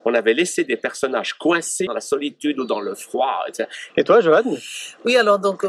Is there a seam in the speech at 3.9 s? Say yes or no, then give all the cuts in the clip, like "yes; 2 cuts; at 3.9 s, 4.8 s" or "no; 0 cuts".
yes; 2 cuts; at 1.9 s, 3.9 s